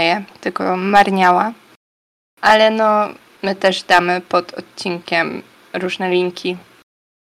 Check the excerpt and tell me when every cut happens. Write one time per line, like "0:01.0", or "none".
0:03.4